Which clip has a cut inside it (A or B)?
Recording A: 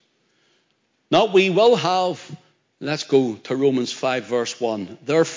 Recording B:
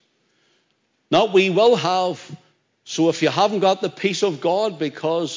A